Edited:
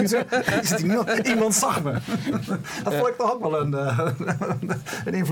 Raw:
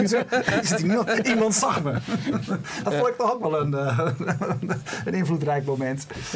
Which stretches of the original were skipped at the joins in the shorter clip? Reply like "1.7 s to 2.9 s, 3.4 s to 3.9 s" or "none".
none